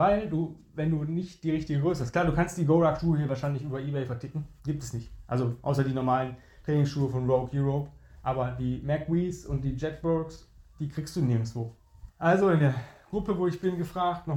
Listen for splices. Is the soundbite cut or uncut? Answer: cut